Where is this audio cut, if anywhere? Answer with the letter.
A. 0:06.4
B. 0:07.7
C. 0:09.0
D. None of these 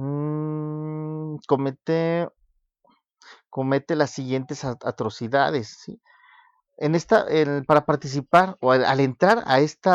D